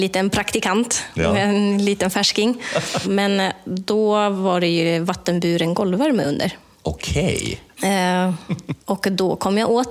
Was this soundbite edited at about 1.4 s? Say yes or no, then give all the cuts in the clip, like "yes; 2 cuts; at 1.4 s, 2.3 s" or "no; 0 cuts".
no; 2 cuts; at 3.0 s, 7.8 s